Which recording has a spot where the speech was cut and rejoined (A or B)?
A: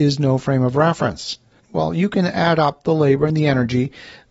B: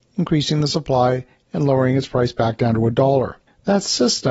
A